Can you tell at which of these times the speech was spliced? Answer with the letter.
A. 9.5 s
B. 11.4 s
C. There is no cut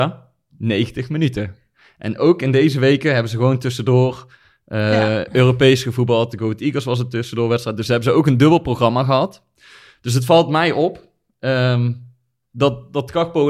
C